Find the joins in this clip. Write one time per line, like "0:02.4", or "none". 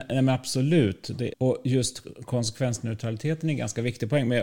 0:01.3

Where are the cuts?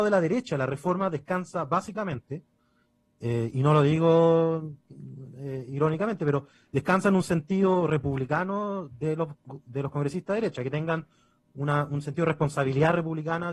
none

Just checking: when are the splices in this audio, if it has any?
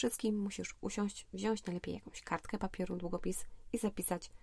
none

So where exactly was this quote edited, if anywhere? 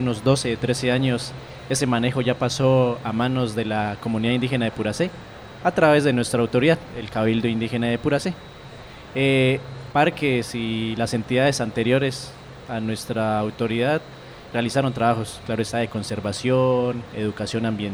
0:14.5

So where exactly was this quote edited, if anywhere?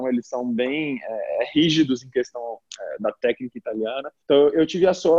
0:04.2

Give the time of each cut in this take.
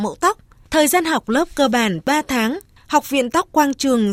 0:02.8

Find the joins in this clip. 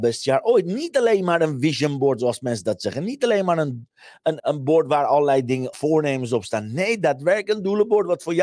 0:04.4
0:05.7

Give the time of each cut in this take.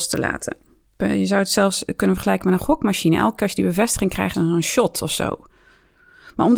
0:01.0
0:04.3

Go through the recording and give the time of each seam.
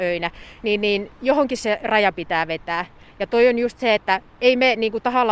0:04.0

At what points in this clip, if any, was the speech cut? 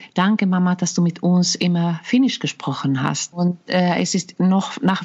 0:03.3

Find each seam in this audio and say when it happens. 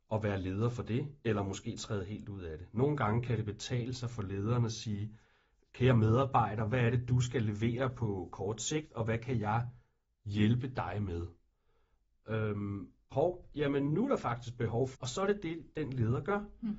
0:13.1
0:14.9

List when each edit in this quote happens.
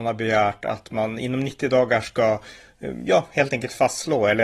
none

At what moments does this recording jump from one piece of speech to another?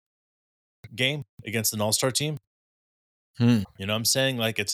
0:03.6

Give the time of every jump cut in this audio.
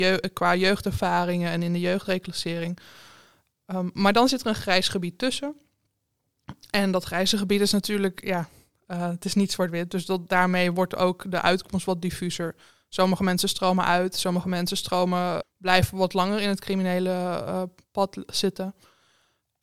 0:15.4

